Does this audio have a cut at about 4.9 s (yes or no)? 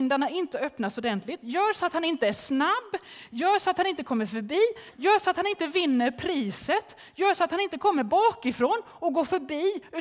yes